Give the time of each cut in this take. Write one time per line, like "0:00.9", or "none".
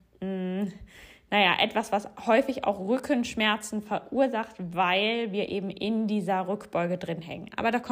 none